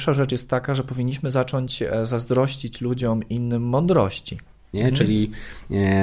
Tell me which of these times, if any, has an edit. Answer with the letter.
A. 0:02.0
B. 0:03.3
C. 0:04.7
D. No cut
C